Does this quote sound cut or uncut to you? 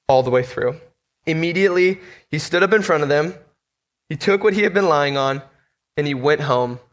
cut